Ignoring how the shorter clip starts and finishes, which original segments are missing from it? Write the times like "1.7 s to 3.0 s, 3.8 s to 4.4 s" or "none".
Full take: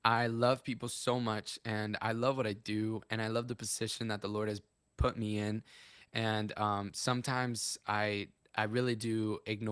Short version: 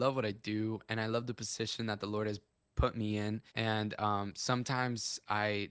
5.7 s to 6.1 s